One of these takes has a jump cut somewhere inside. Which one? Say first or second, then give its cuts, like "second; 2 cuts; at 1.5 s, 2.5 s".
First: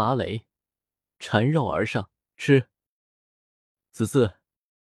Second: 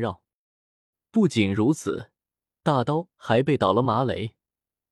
first; 1 cut; at 2.3 s